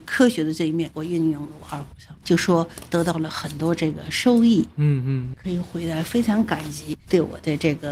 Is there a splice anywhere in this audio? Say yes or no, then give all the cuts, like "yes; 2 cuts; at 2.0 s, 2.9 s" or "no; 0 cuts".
yes; 2 cuts; at 2.2 s, 5.3 s